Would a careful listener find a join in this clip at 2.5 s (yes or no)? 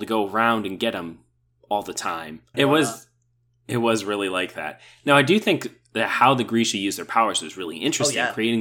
yes